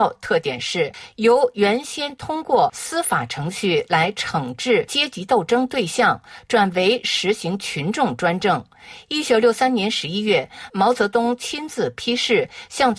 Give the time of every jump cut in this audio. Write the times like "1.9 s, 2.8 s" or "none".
none